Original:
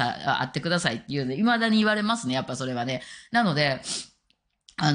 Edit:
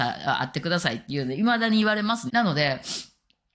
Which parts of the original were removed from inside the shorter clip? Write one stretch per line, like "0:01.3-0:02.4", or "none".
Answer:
0:02.3-0:03.3